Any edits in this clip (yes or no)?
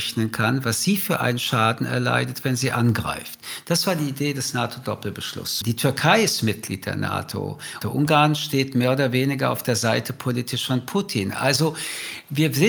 yes